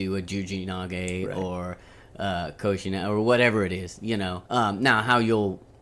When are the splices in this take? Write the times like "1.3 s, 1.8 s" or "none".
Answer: 4.4 s